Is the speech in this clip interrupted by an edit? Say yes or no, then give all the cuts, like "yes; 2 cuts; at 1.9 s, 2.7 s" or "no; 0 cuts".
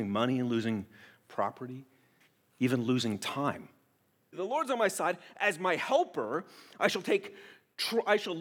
yes; 1 cut; at 4.3 s